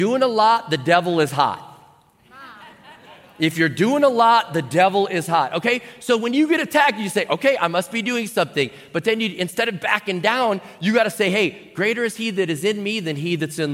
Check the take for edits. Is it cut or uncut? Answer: uncut